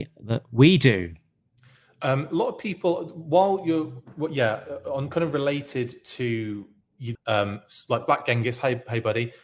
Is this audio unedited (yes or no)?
no